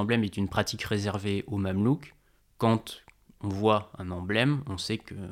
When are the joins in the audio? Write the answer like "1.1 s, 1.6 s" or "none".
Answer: none